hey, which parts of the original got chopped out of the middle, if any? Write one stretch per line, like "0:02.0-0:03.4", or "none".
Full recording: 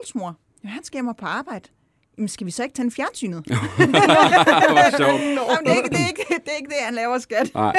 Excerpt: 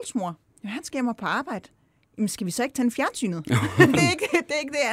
0:03.9-0:05.9